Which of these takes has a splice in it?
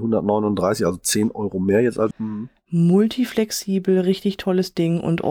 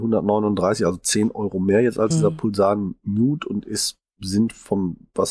first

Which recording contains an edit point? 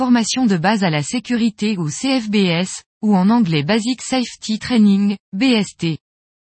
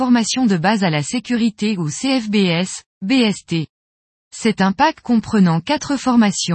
second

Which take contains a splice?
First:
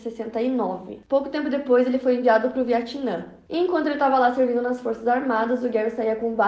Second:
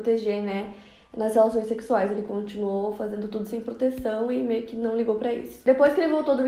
first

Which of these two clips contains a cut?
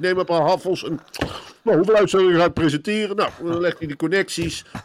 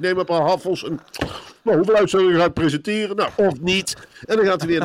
second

